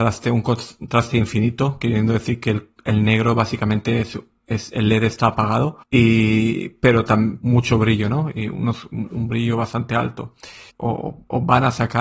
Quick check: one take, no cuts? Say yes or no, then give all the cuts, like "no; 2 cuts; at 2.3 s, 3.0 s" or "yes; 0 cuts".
no; 3 cuts; at 5.8 s, 7.4 s, 10.7 s